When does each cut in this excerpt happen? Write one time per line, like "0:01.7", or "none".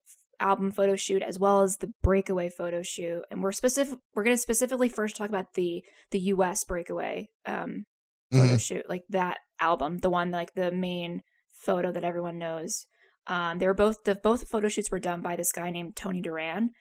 none